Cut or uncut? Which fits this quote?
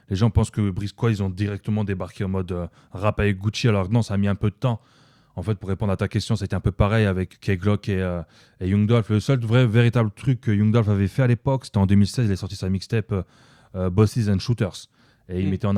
cut